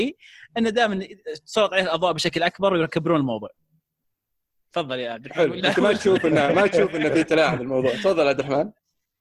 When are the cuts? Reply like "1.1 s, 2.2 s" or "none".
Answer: none